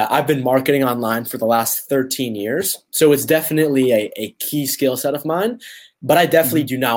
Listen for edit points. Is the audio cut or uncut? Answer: uncut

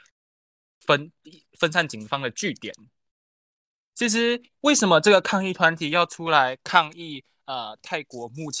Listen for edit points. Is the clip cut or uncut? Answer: uncut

